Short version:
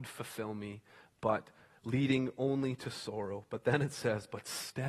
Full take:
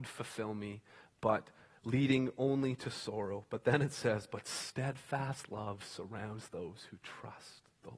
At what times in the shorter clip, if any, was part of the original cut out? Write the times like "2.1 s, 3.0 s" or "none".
none